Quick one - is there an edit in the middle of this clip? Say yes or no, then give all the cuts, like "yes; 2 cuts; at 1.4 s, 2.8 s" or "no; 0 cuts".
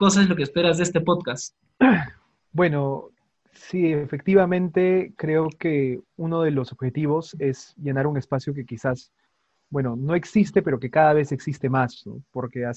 no; 0 cuts